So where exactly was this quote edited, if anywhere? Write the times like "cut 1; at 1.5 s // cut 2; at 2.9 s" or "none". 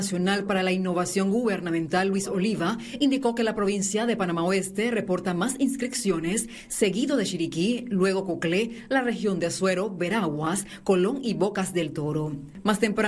none